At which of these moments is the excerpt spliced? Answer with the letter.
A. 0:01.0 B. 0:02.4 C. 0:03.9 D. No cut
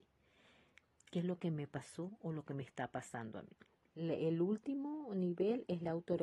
C